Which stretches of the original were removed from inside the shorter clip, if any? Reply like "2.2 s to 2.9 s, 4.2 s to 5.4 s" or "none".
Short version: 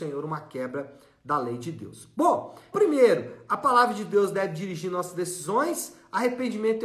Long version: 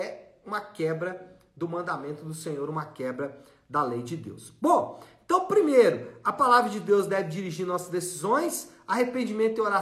5.2 s to 5.5 s